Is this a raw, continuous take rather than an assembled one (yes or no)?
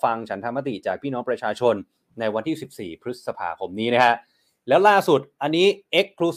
yes